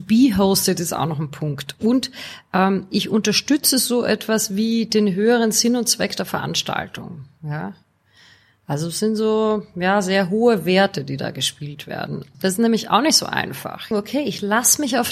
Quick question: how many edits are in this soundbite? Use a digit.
2